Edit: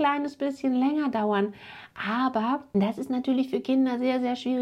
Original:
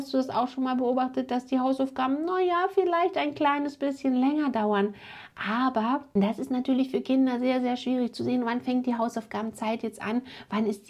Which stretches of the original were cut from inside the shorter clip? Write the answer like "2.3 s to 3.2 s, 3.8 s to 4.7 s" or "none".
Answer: none